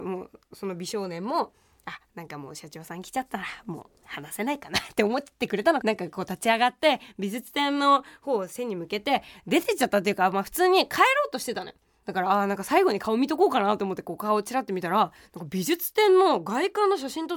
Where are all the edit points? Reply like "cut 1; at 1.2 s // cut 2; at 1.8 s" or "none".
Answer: cut 1; at 5.8 s // cut 2; at 12.0 s